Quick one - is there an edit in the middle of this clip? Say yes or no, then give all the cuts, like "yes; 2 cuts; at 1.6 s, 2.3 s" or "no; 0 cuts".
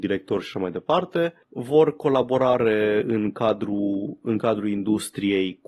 no; 0 cuts